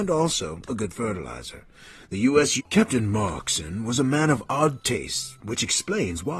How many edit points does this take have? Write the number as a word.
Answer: one